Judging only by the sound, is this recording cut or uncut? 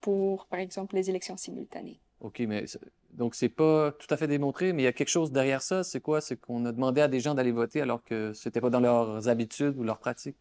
cut